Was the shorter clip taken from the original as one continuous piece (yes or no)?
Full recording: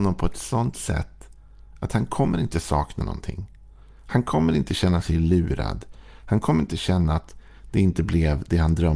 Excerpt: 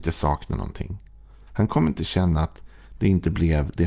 no